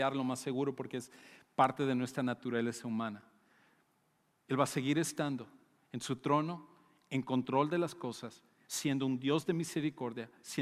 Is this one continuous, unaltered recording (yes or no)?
no